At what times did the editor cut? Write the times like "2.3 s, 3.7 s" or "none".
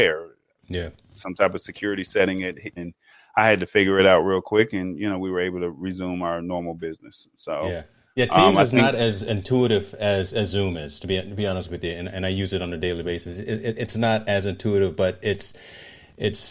2.8 s